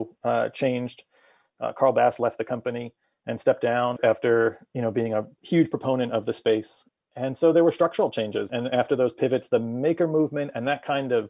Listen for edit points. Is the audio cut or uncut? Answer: uncut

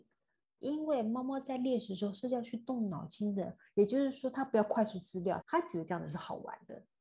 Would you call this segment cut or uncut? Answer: cut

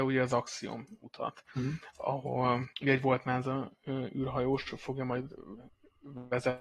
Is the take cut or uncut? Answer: cut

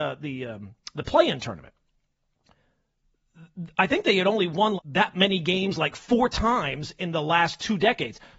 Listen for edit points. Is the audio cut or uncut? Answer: cut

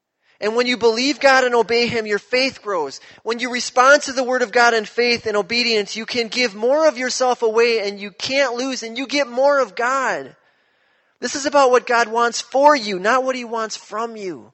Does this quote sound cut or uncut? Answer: uncut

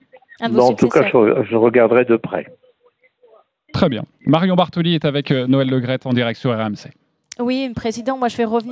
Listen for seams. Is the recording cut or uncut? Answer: uncut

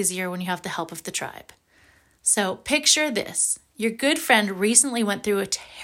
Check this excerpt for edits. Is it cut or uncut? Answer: uncut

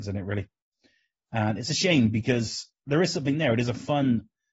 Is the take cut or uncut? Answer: uncut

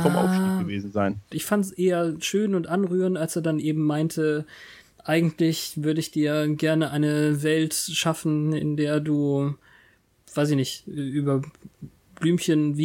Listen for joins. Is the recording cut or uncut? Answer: cut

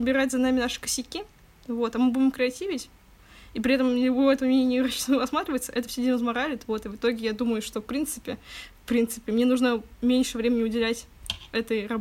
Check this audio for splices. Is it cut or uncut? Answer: uncut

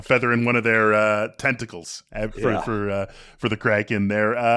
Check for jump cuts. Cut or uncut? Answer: uncut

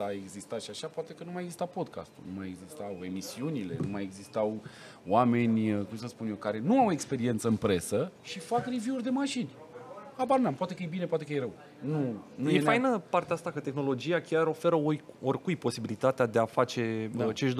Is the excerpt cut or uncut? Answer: cut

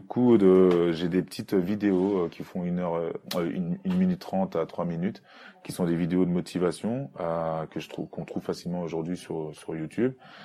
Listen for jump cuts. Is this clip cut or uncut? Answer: uncut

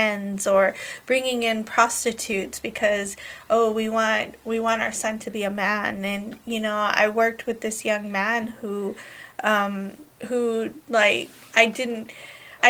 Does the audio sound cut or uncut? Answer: cut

